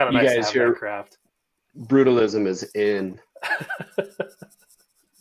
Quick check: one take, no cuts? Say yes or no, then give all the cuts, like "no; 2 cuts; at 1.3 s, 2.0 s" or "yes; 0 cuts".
yes; 0 cuts